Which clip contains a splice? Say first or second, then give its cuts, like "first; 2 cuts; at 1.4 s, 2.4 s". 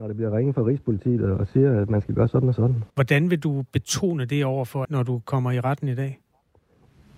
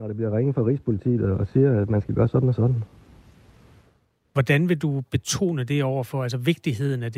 first; 2 cuts; at 2.9 s, 4.8 s